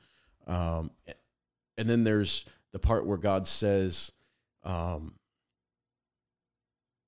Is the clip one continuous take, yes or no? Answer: yes